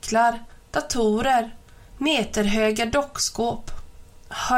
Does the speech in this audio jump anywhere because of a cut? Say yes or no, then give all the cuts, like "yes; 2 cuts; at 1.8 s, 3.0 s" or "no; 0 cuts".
no; 0 cuts